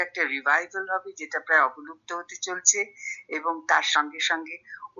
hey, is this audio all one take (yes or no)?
yes